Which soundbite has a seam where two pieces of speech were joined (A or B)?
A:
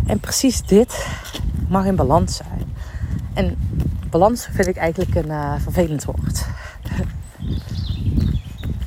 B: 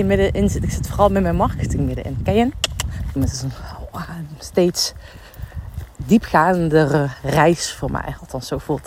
B